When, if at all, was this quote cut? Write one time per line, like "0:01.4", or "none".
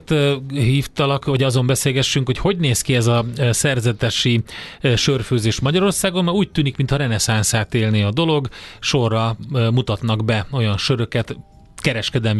0:01.2

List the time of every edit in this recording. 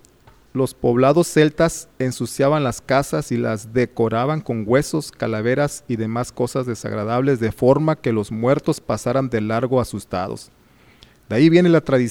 none

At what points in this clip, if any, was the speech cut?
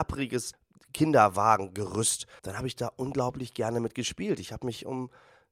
0:02.4

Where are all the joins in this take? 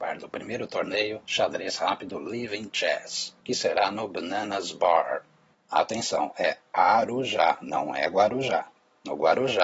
none

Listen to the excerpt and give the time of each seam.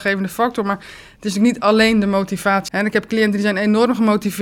0:02.7

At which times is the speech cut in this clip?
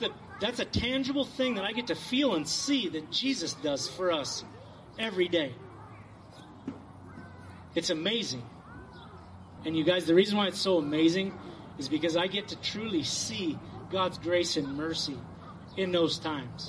0:09.6

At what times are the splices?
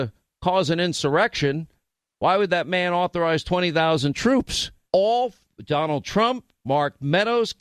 0:04.9

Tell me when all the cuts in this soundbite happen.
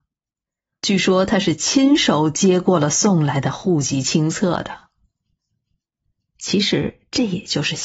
none

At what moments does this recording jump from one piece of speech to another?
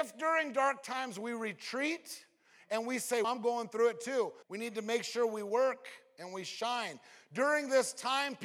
0:03.2
0:04.4

